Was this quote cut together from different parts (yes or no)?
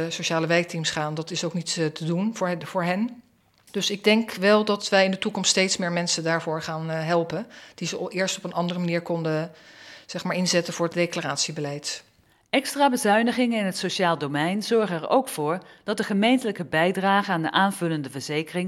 yes